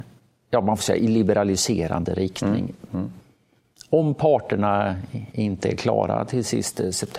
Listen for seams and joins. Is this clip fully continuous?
no; 1 cut; at 2.9 s

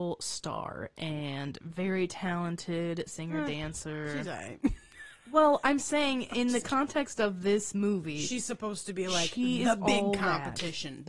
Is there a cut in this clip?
no; 0 cuts

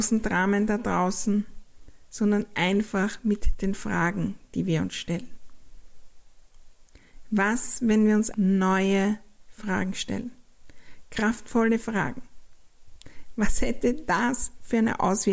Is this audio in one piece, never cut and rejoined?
no; 1 cut; at 8.3 s

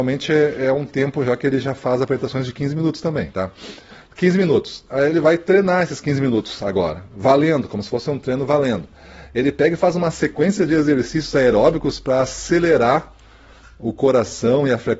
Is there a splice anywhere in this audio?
no; 0 cuts

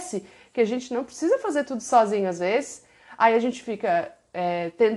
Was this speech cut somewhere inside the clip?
no; 0 cuts

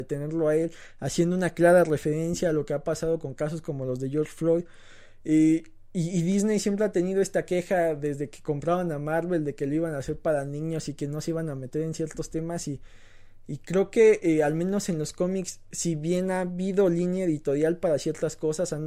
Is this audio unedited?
yes; 0 cuts

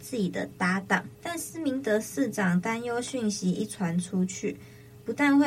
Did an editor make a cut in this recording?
yes; 1 cut; at 1.2 s

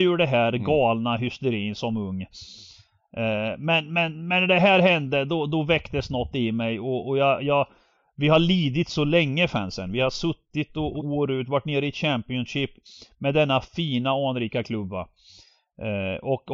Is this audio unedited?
no; 1 cut; at 11.0 s

